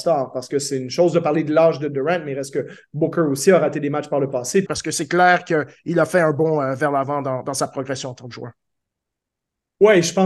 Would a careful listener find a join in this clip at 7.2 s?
no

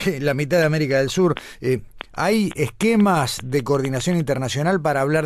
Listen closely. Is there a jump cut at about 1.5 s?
no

